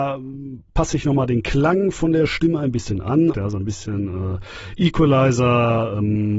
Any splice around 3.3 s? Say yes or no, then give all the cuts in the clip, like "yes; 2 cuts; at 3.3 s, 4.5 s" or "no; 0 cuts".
yes; 1 cut; at 3.3 s